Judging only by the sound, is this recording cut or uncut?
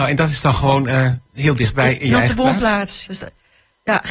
cut